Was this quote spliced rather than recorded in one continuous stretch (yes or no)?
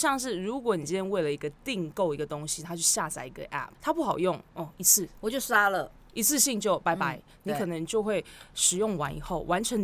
yes